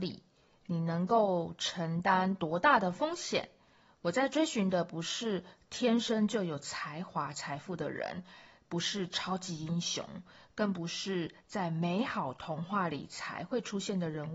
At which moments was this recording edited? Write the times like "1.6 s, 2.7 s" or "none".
none